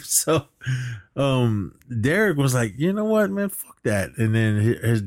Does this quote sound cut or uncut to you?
uncut